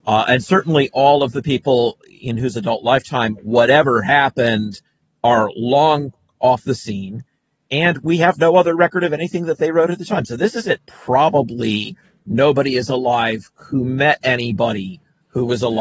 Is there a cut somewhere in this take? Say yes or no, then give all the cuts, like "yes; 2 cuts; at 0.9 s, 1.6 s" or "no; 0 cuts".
yes; 1 cut; at 10.8 s